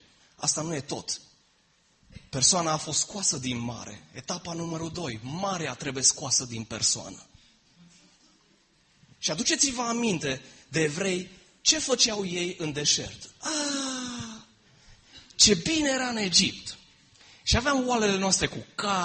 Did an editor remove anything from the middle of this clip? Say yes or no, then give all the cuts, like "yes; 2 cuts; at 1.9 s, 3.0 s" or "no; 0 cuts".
no; 0 cuts